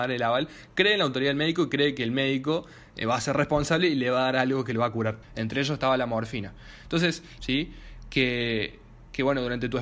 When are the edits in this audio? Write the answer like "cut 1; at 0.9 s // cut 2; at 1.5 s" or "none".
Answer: cut 1; at 5.2 s // cut 2; at 7.4 s